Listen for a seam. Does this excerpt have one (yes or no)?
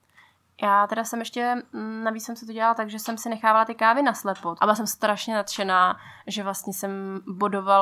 yes